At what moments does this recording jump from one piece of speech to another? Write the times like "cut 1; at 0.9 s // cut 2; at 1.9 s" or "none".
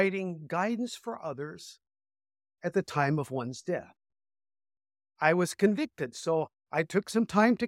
cut 1; at 5.0 s